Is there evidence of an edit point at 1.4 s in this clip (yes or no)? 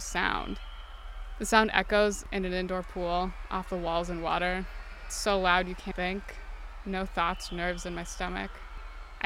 no